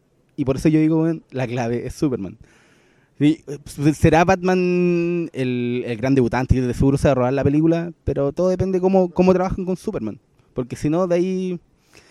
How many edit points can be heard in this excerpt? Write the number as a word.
zero